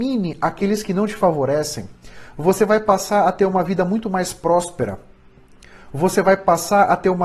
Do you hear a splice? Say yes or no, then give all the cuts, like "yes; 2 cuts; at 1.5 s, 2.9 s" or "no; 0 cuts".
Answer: no; 0 cuts